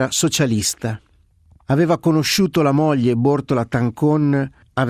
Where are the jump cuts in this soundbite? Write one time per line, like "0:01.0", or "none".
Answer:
none